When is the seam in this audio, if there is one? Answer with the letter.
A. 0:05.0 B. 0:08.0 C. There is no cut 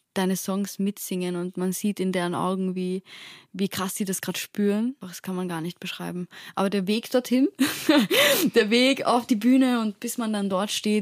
A